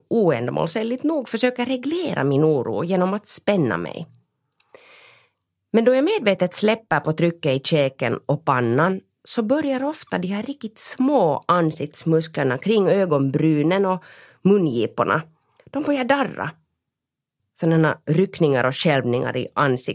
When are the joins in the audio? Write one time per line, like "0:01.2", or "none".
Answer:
0:17.4